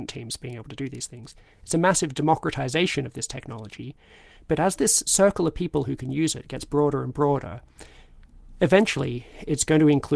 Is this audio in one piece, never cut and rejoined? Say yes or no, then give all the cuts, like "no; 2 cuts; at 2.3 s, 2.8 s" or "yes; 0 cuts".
yes; 0 cuts